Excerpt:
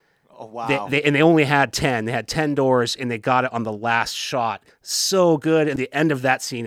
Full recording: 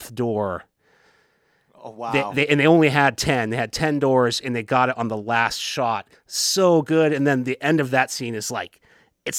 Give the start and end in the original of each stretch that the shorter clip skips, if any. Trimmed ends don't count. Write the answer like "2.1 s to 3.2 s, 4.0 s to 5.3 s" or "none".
7.2 s to 7.4 s